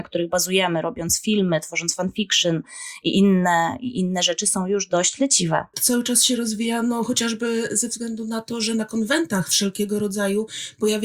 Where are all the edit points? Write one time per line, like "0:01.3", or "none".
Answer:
0:05.7